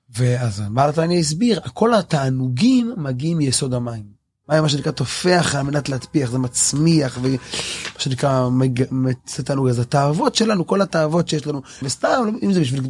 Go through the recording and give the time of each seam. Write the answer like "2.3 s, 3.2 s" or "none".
4.4 s, 11.8 s